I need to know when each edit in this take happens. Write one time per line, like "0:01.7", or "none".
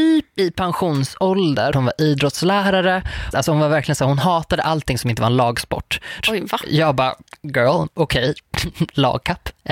0:01.7
0:03.3
0:06.2